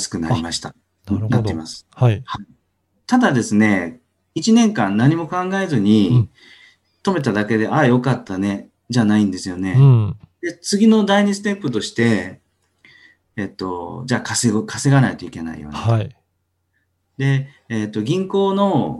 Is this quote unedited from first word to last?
yes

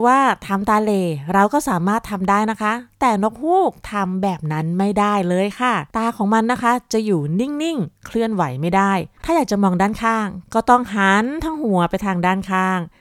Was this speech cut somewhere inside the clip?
yes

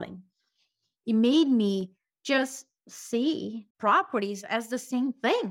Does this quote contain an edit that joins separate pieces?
yes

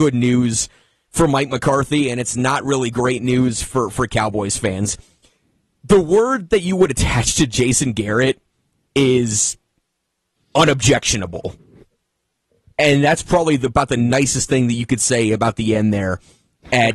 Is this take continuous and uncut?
yes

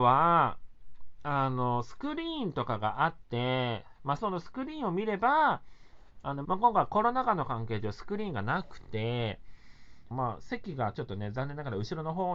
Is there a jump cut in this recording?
yes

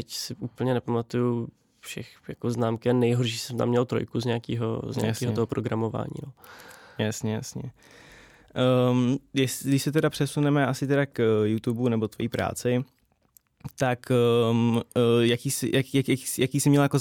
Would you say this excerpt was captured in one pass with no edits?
yes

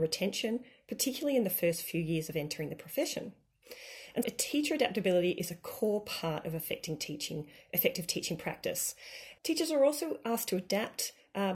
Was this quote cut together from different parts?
yes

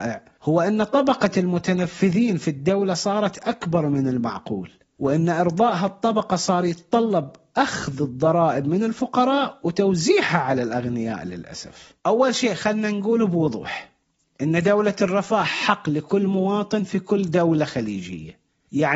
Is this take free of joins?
no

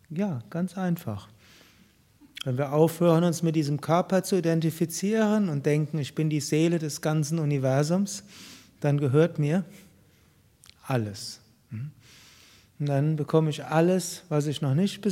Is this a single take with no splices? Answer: yes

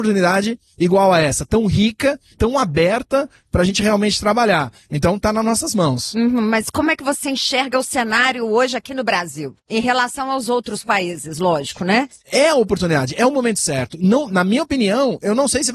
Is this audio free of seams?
no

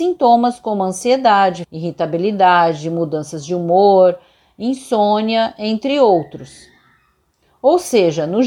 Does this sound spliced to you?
yes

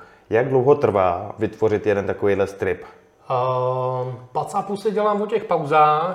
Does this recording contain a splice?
yes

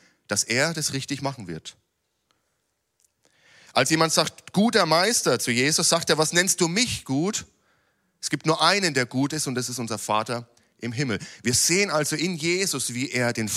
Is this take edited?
no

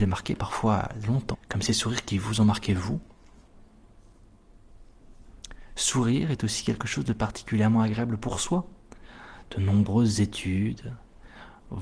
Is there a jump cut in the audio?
yes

